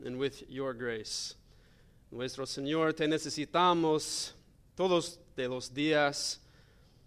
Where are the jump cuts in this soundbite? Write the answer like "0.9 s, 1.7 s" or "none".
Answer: none